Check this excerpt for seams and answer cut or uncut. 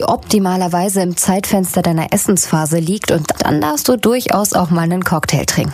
cut